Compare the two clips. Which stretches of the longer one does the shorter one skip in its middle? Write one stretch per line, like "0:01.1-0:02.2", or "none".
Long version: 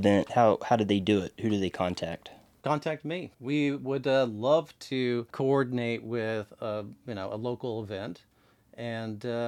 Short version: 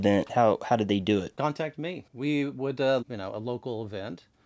0:01.4-0:02.6
0:04.3-0:07.0